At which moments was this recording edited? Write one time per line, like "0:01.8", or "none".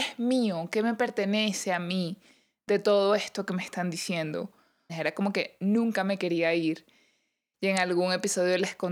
0:04.9
0:07.5